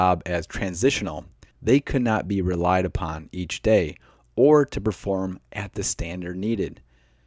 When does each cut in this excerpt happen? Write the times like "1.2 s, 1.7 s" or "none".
1.5 s